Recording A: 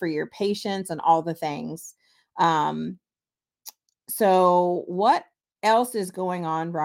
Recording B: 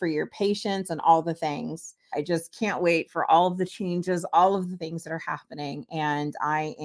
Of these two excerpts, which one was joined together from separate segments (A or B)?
B